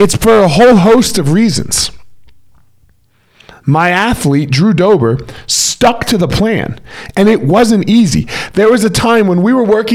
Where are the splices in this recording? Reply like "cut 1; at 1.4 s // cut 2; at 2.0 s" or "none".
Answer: none